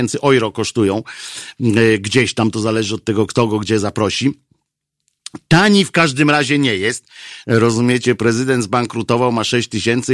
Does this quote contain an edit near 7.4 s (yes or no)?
yes